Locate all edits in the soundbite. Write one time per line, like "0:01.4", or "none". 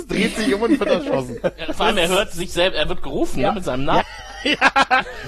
0:04.0